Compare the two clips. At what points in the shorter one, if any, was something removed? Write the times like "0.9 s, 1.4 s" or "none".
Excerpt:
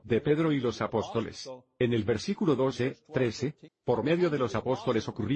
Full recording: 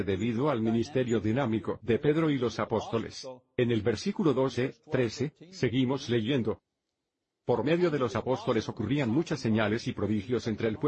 3.7 s